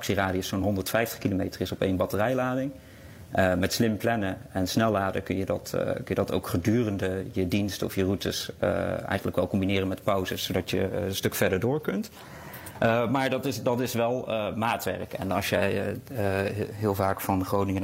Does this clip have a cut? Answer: no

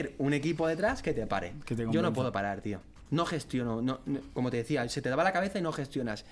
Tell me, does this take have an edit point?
yes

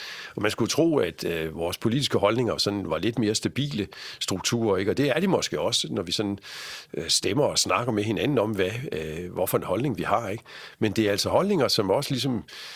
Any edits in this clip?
no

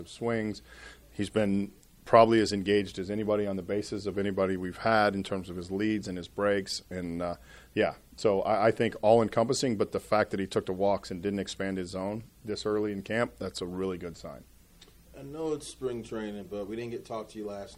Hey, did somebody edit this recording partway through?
no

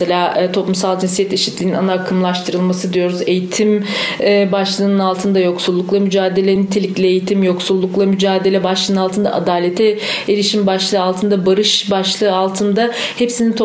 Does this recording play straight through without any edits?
yes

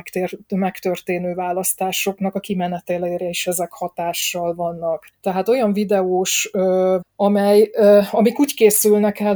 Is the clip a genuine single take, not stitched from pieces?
no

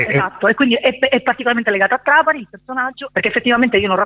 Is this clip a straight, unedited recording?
no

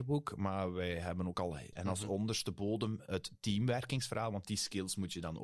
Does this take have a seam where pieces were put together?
yes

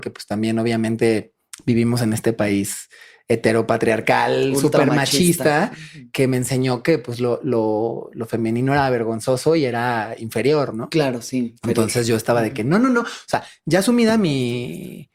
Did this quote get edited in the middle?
no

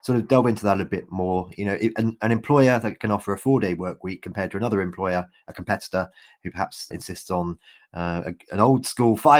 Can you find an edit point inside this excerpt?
yes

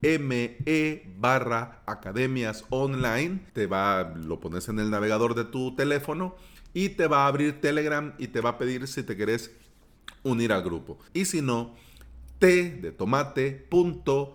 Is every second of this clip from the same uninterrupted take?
no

